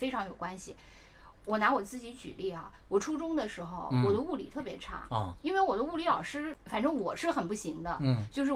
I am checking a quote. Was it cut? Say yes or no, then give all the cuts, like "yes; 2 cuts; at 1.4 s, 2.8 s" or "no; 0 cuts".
no; 0 cuts